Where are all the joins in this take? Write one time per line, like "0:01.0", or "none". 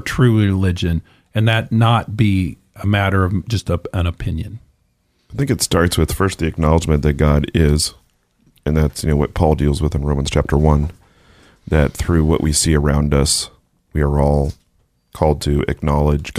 none